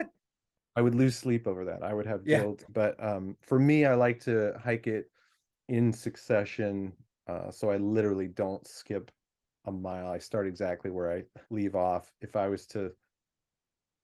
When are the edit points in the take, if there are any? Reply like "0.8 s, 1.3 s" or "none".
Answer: 2.7 s, 11.4 s

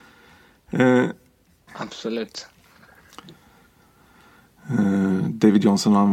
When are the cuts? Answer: 1.7 s

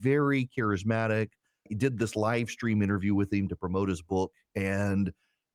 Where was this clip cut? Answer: none

